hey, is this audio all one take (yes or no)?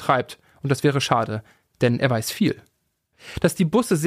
yes